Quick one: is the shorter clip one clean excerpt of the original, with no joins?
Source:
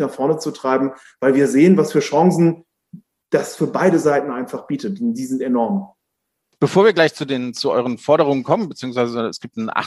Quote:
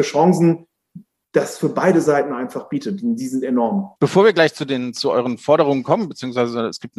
no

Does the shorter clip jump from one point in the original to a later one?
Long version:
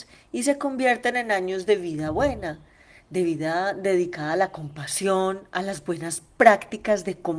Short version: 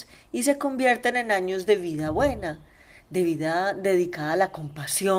no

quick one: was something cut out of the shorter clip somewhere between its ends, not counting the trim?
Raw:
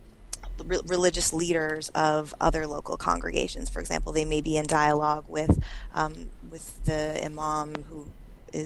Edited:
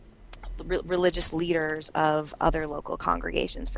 no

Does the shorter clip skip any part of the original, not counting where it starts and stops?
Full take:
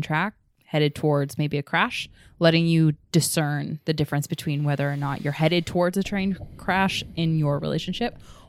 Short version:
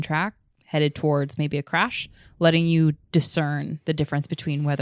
no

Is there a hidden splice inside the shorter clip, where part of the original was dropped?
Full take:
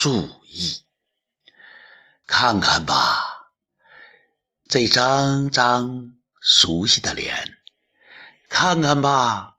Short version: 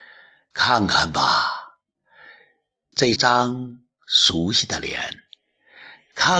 yes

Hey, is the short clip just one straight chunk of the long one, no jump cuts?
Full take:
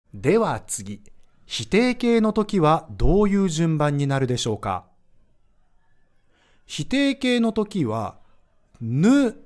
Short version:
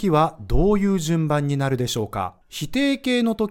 no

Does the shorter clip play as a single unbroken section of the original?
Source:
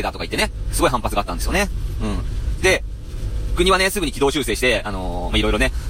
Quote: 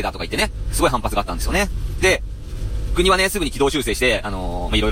no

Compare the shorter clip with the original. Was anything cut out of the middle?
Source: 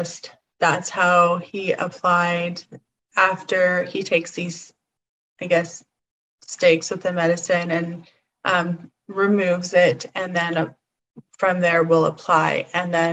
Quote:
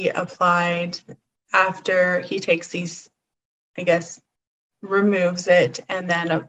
yes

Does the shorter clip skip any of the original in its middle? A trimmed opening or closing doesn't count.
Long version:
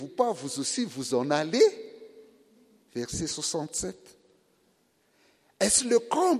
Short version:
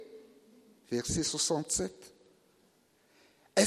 no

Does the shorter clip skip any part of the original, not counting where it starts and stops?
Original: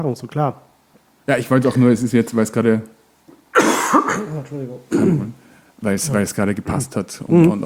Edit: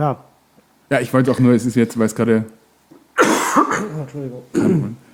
no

